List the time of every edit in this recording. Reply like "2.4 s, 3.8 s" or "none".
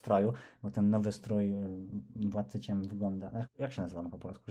3.4 s